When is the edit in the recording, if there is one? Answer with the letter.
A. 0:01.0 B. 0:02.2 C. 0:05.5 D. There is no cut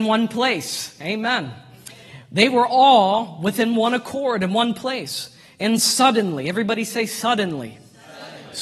D